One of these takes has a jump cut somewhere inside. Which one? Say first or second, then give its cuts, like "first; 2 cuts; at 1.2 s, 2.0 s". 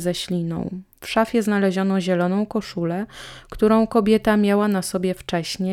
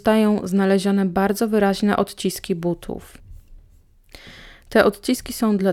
first; 1 cut; at 0.9 s